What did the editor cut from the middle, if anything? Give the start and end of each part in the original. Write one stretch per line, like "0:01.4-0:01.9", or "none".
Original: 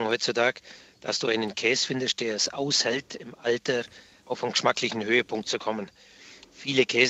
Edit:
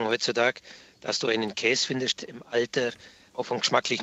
0:02.2-0:03.1